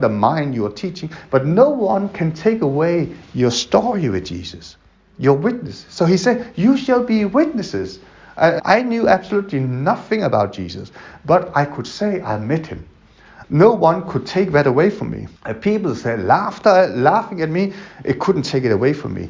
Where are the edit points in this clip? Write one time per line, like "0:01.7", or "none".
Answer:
0:08.6
0:13.4
0:15.4